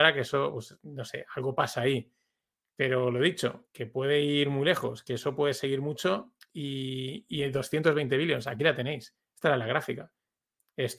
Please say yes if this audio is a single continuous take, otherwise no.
yes